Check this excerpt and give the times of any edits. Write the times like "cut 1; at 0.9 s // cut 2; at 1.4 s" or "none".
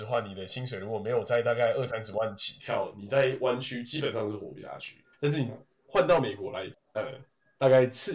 cut 1; at 5.1 s // cut 2; at 6.7 s